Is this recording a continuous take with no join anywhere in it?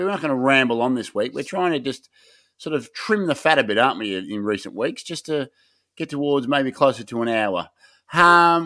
yes; 0 cuts

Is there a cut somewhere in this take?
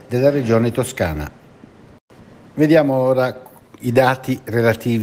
no; 0 cuts

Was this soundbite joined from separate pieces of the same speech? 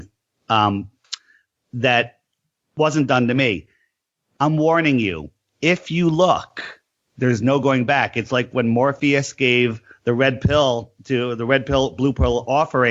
no; 0 cuts

